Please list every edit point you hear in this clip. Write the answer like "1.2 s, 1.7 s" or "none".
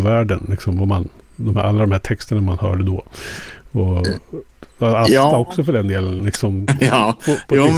6.2 s